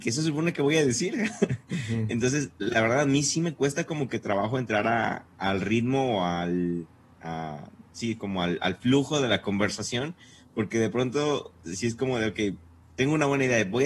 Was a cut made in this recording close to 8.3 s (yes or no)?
no